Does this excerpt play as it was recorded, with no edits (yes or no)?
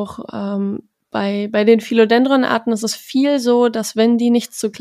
yes